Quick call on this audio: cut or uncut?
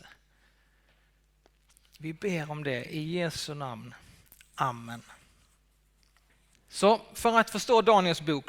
uncut